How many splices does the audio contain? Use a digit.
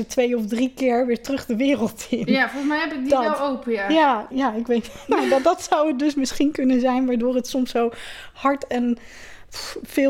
1